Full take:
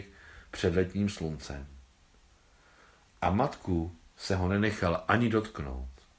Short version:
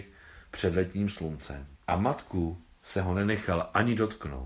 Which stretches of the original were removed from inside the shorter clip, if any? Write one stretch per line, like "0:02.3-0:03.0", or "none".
0:01.7-0:03.1